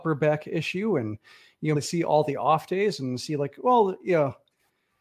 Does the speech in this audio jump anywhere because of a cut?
yes; 1 cut; at 1.8 s

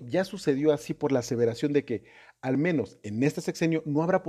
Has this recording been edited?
no; 0 cuts

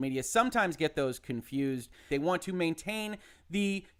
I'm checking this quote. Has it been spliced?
yes; 1 cut; at 2.1 s

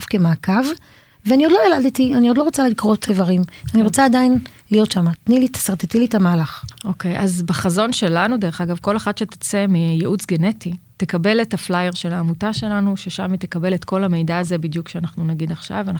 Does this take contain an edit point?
no; 0 cuts

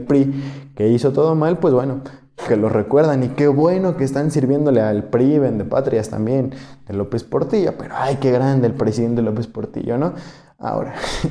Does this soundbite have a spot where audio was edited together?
yes; 1 cut; at 2.5 s

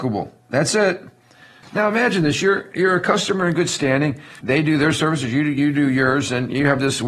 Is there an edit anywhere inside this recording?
yes; 2 cuts; at 1.6 s, 4.4 s

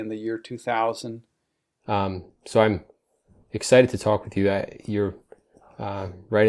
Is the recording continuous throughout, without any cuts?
no; 1 cut; at 1.8 s

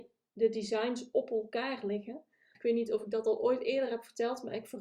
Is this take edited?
yes; 1 cut; at 2.5 s

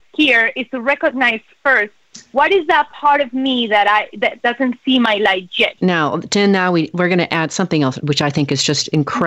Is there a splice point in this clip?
yes; 2 cuts; at 5.8 s, 8.0 s

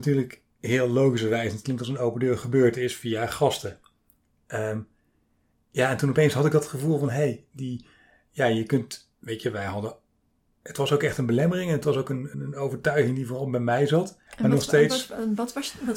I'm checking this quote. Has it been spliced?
yes; 2 cuts; at 12.3 s, 14.3 s

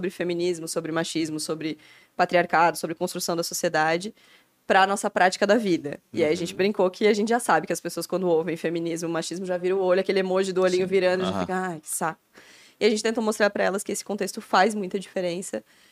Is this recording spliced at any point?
no; 0 cuts

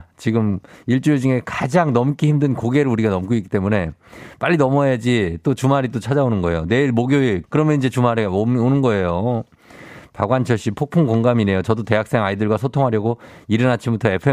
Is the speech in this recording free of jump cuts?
no; 1 cut; at 7.4 s

